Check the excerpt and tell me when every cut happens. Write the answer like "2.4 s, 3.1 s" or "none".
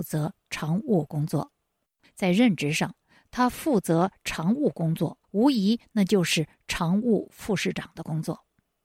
2.0 s, 5.2 s